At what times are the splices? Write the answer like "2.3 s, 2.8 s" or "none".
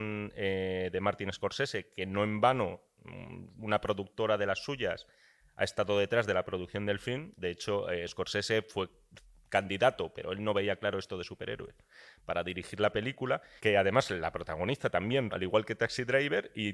13.6 s, 15.3 s